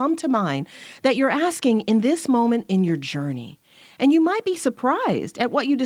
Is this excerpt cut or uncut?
uncut